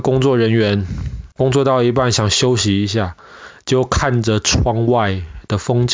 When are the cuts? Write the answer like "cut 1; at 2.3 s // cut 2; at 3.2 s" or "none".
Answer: cut 1; at 1.3 s